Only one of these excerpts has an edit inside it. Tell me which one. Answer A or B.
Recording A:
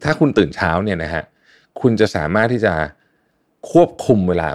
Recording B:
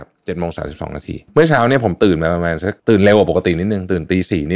B